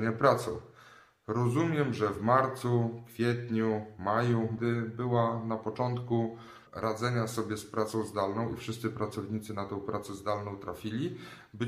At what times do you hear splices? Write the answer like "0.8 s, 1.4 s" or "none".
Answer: 4.6 s, 6.7 s